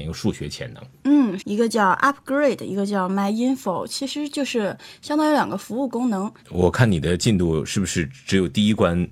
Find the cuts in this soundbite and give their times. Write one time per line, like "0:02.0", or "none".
0:01.4
0:06.4